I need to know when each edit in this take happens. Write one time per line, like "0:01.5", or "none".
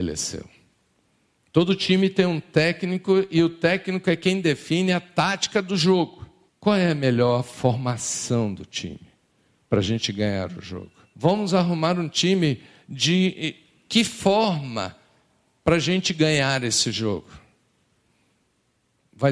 0:06.5
0:11.1